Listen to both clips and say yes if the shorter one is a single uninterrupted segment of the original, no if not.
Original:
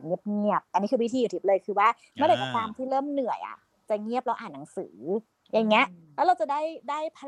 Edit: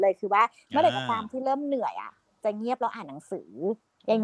yes